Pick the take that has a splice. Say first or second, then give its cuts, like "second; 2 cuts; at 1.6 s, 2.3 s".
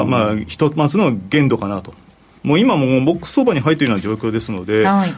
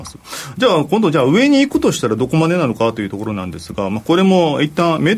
first; 1 cut; at 2.4 s